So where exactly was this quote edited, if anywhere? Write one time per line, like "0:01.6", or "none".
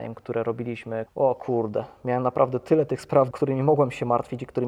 0:01.1
0:03.3